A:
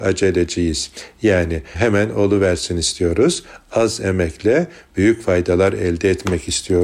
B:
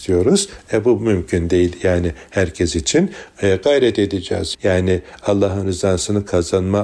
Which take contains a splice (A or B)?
B